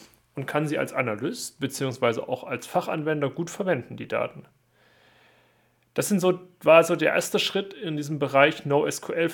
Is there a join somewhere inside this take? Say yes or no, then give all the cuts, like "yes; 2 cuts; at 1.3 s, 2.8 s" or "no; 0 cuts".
no; 0 cuts